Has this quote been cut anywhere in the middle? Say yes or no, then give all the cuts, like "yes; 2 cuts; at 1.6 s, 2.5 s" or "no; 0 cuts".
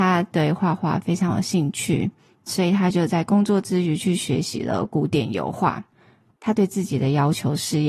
no; 0 cuts